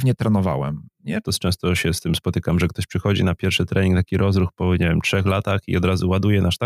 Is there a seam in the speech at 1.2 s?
yes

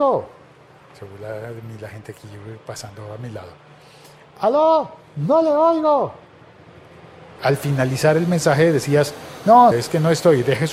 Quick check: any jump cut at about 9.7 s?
yes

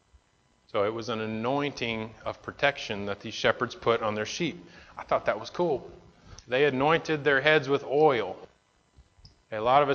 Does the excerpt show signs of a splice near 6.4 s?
yes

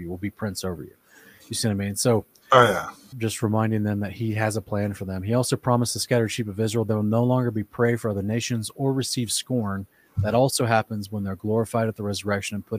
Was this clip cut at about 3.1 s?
yes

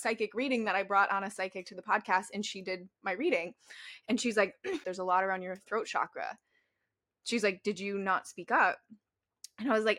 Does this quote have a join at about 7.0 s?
no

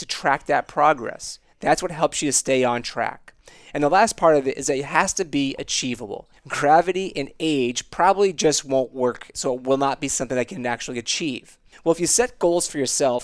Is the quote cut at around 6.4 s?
yes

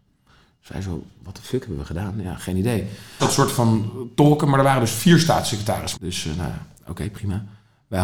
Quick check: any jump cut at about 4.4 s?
no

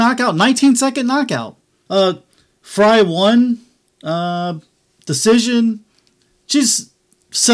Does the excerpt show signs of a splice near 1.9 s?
yes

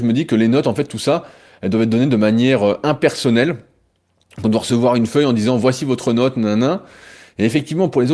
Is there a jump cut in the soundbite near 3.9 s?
no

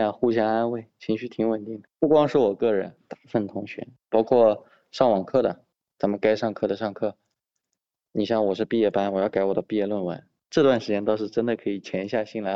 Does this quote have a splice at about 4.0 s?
yes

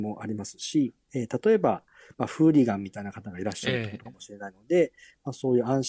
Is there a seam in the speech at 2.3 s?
no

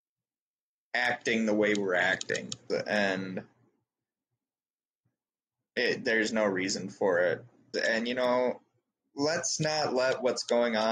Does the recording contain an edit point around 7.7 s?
yes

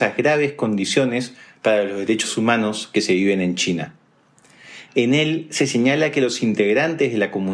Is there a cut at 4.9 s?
yes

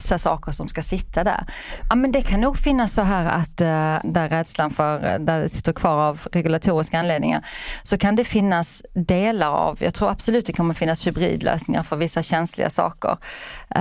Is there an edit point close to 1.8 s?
yes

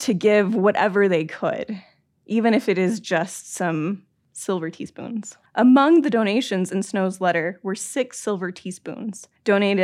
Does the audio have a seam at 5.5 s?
yes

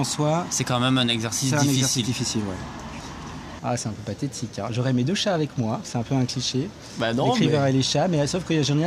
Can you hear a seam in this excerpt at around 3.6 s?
yes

